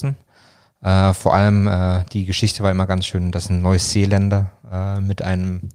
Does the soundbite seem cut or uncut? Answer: uncut